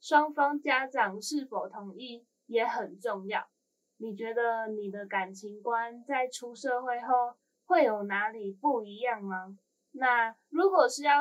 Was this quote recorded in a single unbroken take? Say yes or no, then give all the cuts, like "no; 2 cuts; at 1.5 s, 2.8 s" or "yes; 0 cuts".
no; 2 cuts; at 3.9 s, 9.7 s